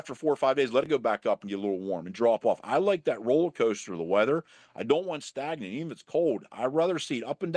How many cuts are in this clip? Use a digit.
0